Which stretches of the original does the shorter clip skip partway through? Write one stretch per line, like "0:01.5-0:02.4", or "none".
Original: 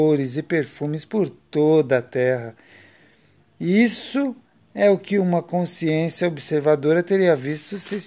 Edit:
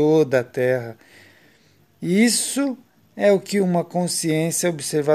none